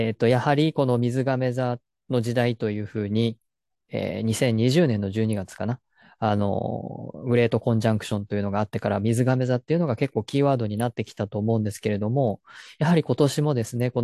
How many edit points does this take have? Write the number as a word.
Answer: zero